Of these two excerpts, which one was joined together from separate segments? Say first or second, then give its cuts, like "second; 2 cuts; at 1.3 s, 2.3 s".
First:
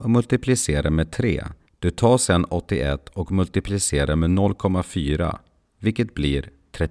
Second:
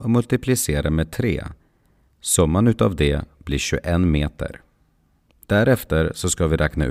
first; 1 cut; at 1.7 s